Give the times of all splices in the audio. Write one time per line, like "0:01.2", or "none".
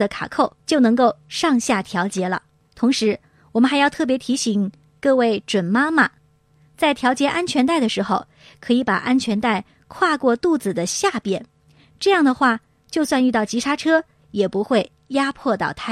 none